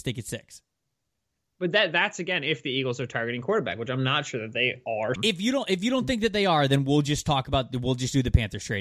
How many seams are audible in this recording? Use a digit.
1